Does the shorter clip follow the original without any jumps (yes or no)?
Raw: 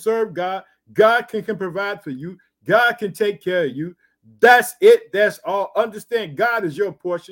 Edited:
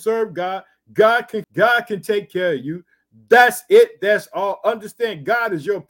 no